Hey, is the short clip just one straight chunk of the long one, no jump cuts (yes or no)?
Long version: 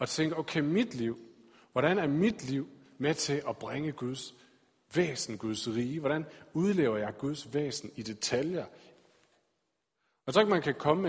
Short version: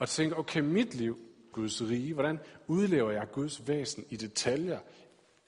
no